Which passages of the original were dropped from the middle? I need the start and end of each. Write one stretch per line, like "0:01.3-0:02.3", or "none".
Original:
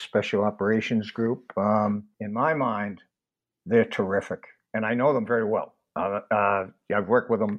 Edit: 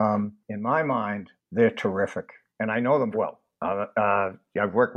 0:03.1-0:03.6
0:05.3-0:05.5